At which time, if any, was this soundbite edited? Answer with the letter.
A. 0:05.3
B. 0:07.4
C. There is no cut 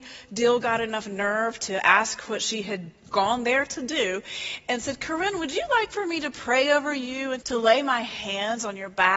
B